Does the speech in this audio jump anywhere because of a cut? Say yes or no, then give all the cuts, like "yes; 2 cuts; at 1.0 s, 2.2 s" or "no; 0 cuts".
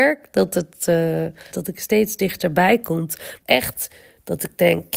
yes; 2 cuts; at 1.5 s, 3.4 s